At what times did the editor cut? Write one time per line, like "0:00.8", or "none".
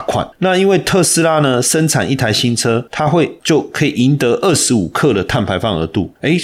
none

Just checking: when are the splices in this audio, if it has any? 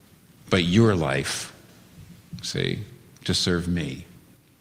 none

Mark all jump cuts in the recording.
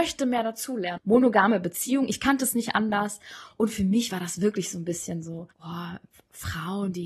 0:01.0
0:05.5

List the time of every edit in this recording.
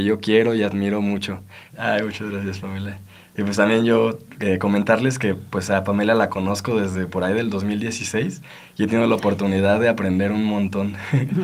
0:01.7

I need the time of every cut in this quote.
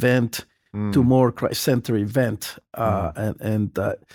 none

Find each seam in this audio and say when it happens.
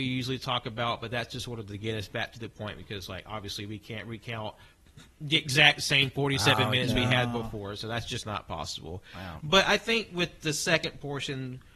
none

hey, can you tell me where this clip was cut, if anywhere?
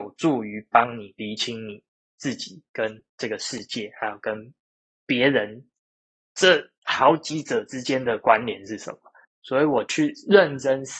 0:09.2

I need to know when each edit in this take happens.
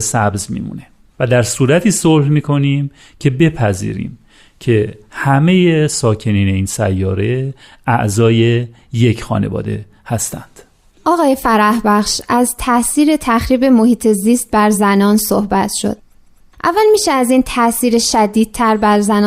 none

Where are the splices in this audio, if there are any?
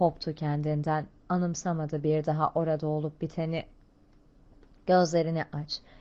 none

